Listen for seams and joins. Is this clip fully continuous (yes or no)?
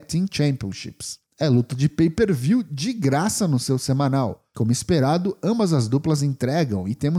yes